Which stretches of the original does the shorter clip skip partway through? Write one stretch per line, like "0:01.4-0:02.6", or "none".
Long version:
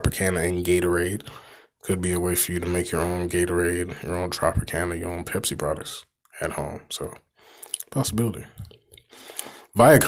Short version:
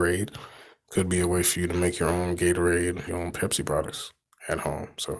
0:04.0-0:05.0